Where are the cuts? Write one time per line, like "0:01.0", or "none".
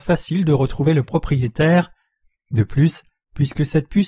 0:02.4